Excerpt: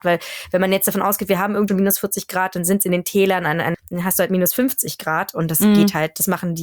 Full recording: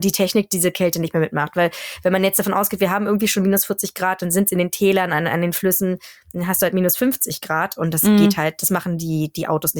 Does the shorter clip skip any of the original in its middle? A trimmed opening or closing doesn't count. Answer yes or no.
yes